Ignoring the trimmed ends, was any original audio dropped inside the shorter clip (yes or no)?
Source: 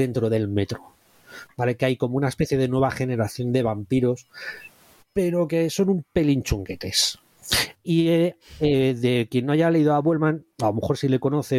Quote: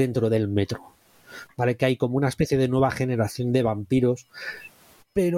no